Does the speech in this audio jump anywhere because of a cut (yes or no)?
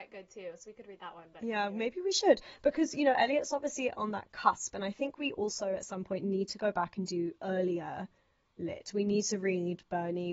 no